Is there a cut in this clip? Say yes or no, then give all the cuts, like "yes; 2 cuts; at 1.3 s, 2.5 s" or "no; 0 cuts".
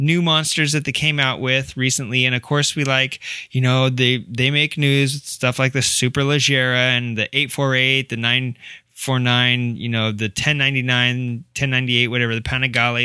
no; 0 cuts